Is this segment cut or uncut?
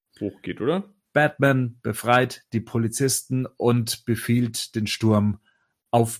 cut